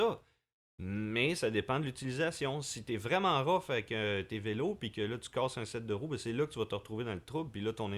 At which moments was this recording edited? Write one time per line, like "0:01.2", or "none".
none

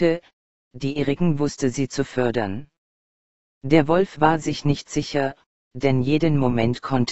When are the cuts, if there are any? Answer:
0:05.5

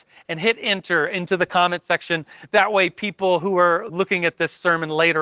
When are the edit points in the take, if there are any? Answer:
0:03.9

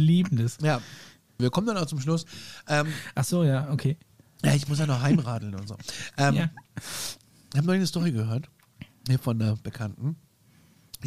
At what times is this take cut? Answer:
0:01.4

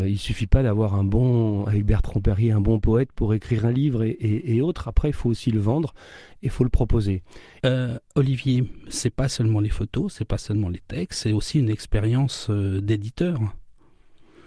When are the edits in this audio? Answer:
0:07.6

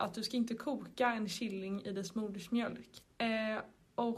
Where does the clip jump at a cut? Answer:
0:03.0

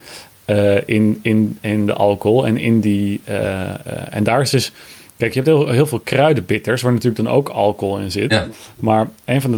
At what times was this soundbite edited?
none

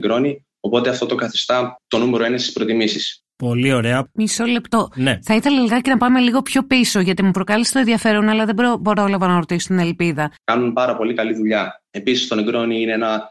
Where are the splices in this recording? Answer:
0:10.4

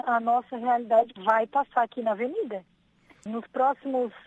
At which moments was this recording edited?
0:01.2
0:03.3

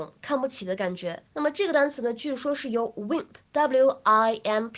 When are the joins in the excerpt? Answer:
0:01.3
0:03.5

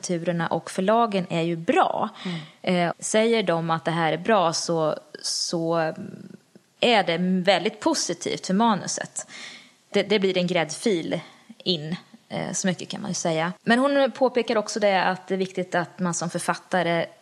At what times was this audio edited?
0:02.9
0:13.6

